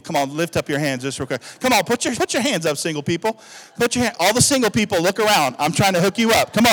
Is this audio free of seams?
no; 2 cuts; at 2.1 s, 4.1 s

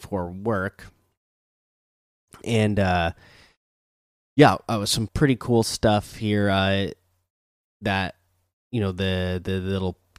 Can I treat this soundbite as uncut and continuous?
no; 1 cut; at 5.1 s

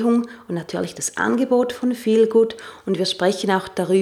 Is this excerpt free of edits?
yes; 0 cuts

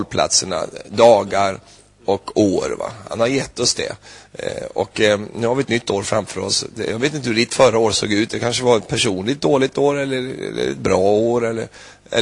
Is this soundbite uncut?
yes; 0 cuts

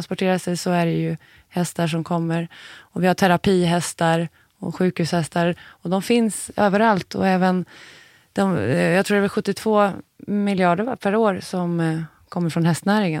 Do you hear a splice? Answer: no; 0 cuts

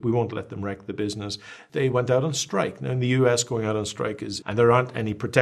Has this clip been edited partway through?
yes; 1 cut; at 4.4 s

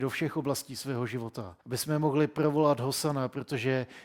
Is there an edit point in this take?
yes; 1 cut; at 1.6 s

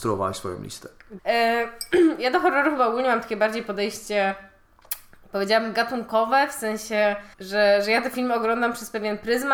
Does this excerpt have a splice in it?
yes; 2 cuts; at 1.2 s, 7.3 s

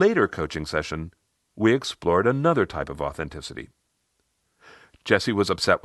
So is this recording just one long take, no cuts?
yes; 0 cuts

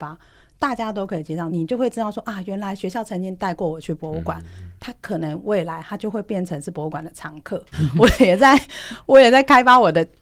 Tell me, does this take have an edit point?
yes; 1 cut; at 7.7 s

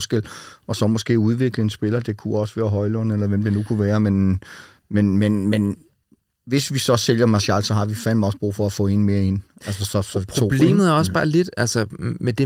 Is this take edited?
no; 0 cuts

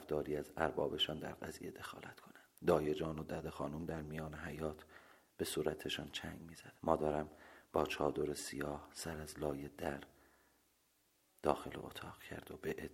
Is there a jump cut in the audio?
yes; 2 cuts; at 2.6 s, 6.8 s

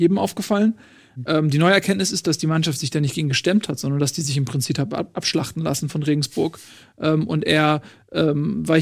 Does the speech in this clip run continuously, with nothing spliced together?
yes; 0 cuts

